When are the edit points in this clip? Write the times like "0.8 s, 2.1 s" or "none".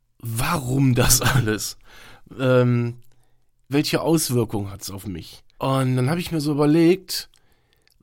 3.7 s, 5.6 s